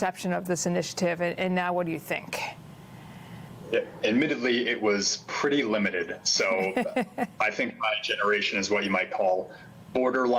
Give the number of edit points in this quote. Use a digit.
0